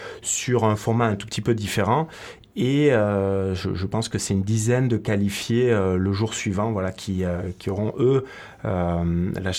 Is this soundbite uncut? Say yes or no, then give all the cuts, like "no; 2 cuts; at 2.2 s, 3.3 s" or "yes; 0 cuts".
yes; 0 cuts